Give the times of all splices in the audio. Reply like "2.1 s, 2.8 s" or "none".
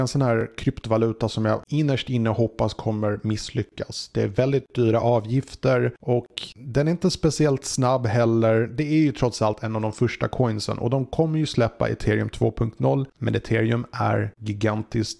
13.1 s